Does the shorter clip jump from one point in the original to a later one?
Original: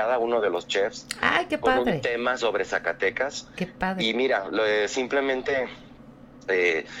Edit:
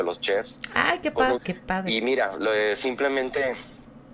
yes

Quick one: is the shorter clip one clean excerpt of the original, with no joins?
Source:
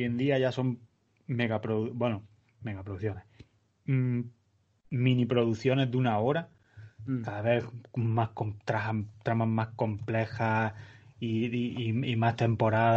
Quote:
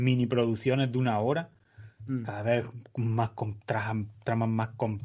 yes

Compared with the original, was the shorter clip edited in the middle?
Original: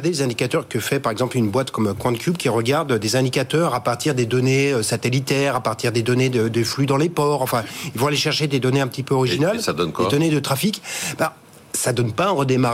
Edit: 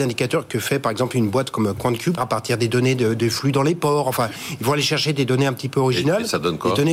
yes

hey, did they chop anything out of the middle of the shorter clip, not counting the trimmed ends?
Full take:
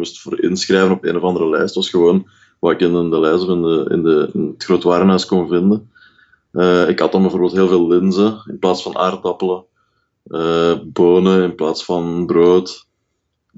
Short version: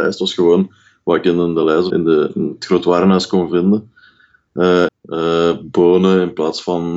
yes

